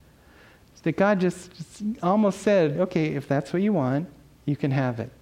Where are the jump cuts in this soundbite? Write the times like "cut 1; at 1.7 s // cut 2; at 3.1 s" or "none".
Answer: cut 1; at 2.7 s